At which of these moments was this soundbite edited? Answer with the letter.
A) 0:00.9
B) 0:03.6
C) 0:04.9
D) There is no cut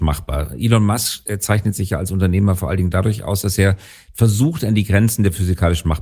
D